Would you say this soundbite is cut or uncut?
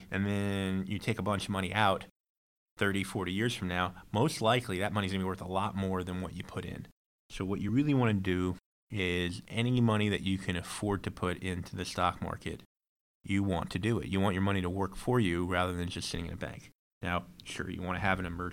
uncut